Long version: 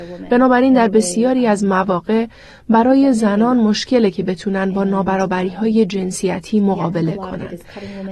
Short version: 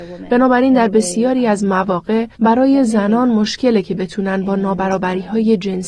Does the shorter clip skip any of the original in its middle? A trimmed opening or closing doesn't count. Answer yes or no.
yes